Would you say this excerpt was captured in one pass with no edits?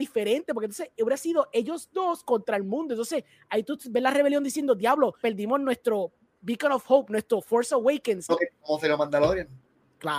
no; 2 cuts; at 5.2 s, 8.3 s

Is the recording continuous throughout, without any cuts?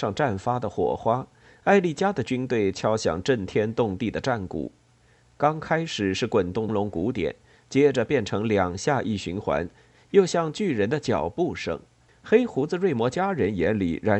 no; 2 cuts; at 6.7 s, 12.1 s

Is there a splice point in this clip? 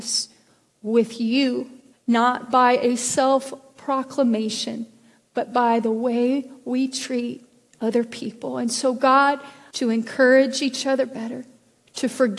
yes; 2 cuts; at 1.9 s, 9.7 s

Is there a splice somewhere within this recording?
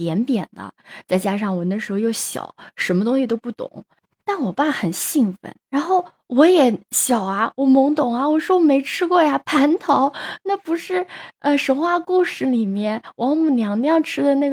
yes; 1 cut; at 5.7 s

